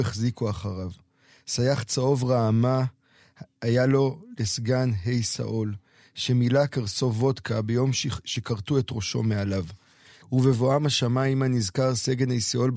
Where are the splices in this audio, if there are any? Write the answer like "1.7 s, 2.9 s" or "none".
10.2 s